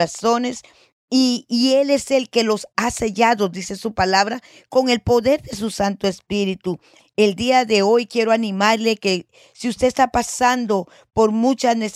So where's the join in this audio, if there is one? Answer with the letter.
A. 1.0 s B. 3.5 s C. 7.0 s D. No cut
C